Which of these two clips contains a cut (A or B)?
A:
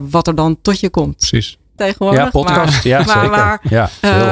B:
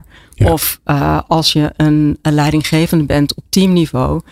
A